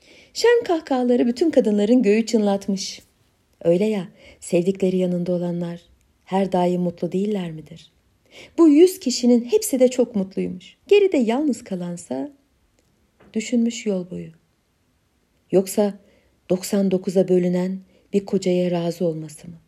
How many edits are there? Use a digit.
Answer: 2